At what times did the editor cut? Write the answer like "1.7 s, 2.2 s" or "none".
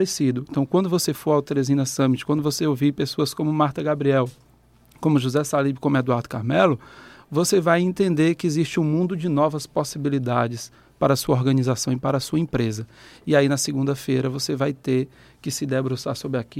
none